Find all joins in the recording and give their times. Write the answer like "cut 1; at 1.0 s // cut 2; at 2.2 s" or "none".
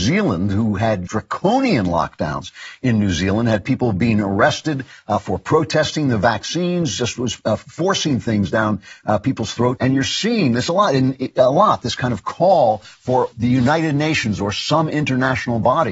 cut 1; at 1.1 s // cut 2; at 9.8 s // cut 3; at 13.3 s